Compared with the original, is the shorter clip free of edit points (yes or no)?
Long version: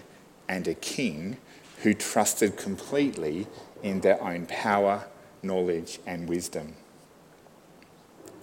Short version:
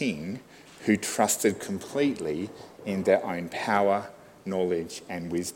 yes